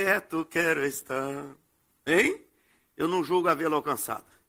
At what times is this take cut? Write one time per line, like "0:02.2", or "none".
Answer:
0:02.9